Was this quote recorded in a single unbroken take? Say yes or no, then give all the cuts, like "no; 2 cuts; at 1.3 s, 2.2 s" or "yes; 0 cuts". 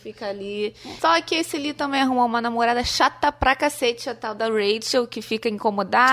no; 1 cut; at 1.0 s